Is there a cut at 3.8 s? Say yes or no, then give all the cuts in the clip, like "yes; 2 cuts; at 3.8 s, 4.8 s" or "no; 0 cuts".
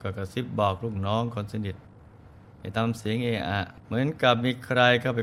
yes; 1 cut; at 3.8 s